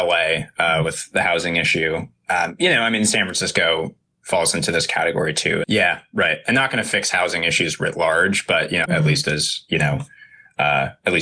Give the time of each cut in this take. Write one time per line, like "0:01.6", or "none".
0:05.6
0:08.9